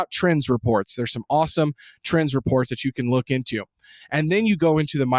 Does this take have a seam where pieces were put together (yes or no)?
no